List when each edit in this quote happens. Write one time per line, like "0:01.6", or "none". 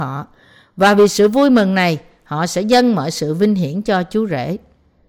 none